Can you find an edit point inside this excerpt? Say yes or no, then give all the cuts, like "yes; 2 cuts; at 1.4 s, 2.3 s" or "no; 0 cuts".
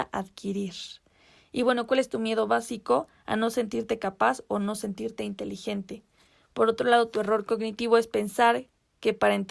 no; 0 cuts